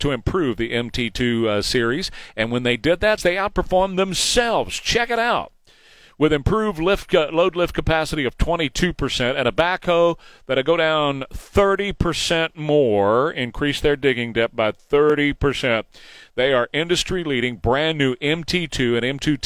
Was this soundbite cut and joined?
yes; 1 cut; at 3.2 s

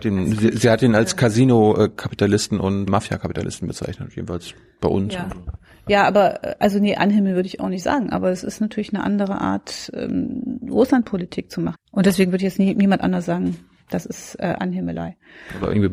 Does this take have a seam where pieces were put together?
yes; 2 cuts; at 2.9 s, 11.7 s

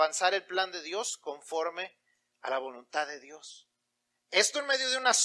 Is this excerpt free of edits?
no; 1 cut; at 4.2 s

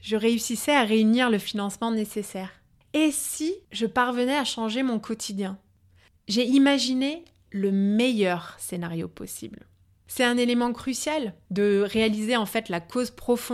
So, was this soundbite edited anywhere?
no; 0 cuts

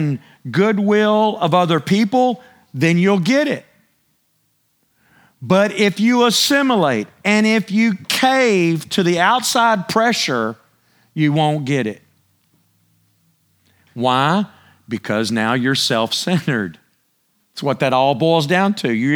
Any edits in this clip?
no; 0 cuts

